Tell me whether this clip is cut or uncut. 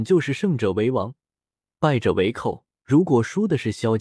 cut